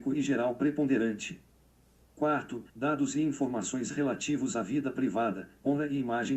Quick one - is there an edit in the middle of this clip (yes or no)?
yes